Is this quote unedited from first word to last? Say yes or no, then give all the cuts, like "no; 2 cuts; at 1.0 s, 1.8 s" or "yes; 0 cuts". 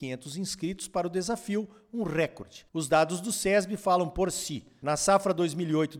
yes; 0 cuts